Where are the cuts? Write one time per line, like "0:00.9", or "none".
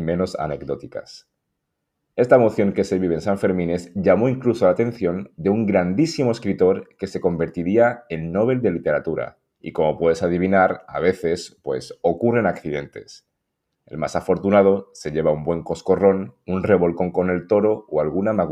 0:09.5